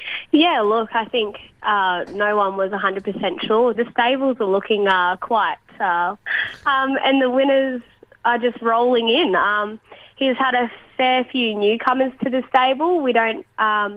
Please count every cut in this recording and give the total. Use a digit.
2